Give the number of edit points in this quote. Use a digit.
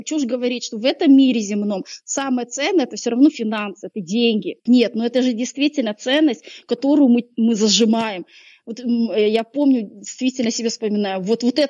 1